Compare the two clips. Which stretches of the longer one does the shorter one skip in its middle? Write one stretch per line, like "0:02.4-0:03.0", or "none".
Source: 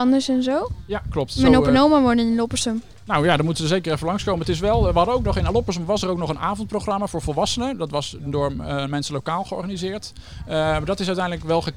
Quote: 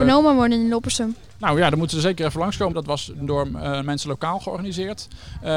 0:04.4-0:07.8